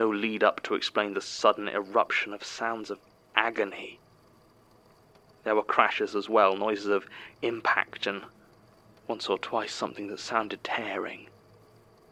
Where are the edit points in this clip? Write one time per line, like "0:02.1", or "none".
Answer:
0:10.6

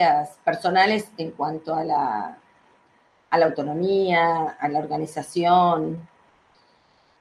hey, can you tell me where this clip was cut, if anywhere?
none

